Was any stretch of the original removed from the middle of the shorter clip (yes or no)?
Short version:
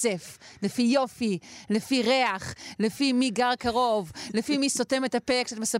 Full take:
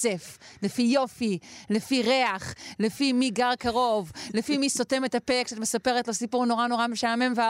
no